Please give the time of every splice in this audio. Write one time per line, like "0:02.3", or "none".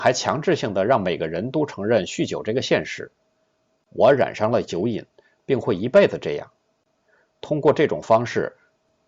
none